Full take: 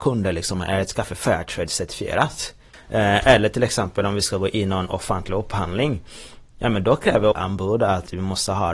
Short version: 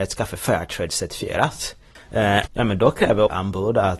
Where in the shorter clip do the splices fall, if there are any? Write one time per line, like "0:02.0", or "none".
0:02.5